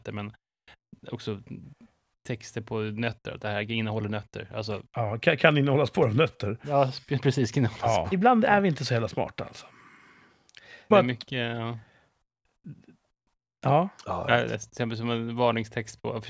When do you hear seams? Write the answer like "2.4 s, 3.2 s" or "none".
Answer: 8.1 s, 10.9 s